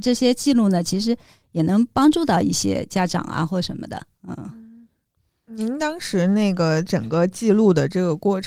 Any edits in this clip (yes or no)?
no